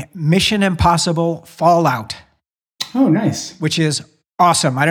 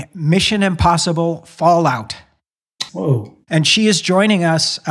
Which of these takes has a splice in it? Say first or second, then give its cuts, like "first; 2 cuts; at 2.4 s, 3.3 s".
second; 1 cut; at 2.9 s